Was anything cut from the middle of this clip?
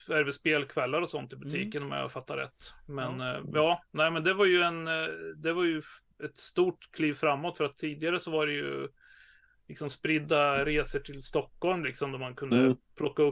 no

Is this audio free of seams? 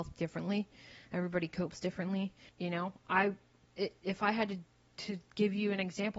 no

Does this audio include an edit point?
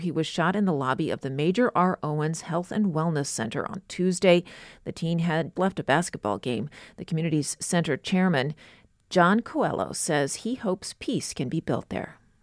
yes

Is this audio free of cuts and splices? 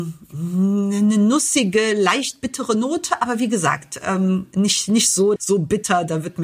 no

